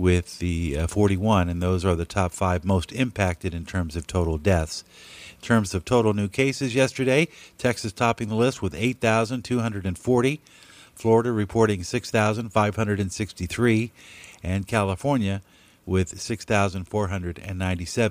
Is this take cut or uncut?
uncut